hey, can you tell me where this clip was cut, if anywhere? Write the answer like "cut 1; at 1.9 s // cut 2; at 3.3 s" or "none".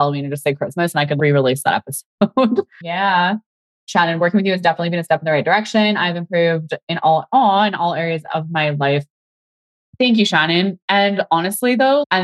cut 1; at 2.8 s